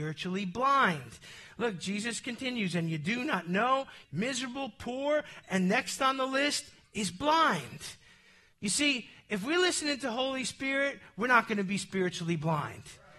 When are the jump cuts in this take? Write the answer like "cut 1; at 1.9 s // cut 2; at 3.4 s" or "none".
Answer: cut 1; at 4.0 s // cut 2; at 8.5 s